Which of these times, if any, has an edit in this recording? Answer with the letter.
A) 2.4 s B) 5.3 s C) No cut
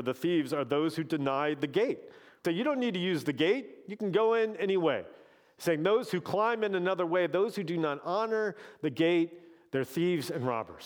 A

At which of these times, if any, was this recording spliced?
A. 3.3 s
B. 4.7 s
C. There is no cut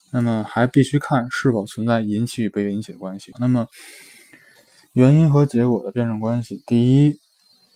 A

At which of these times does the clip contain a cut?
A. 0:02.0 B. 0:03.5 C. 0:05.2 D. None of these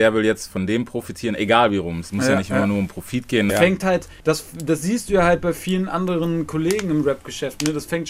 B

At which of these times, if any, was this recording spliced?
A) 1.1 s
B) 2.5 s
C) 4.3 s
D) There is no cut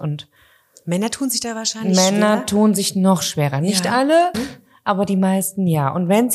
C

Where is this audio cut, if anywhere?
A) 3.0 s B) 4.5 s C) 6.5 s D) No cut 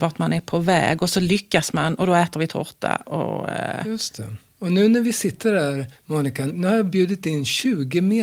C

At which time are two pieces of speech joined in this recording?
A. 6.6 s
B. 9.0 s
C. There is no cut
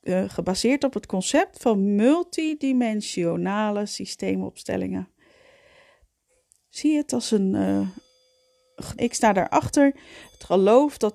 B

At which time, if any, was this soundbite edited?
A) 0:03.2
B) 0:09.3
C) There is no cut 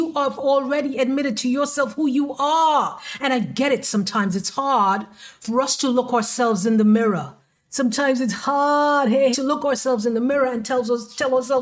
B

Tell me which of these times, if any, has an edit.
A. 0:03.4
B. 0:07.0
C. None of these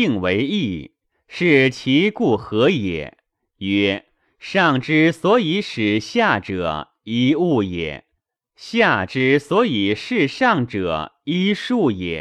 C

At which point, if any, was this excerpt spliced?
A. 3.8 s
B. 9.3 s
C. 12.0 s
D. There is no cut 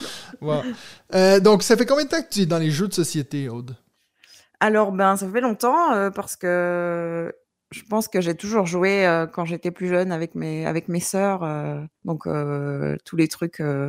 C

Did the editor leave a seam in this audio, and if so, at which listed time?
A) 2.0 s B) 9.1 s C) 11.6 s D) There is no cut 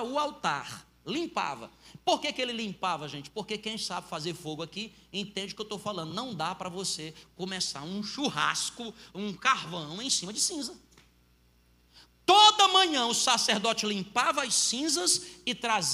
D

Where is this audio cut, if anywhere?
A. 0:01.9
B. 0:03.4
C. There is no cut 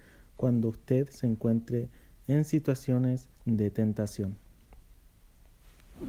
B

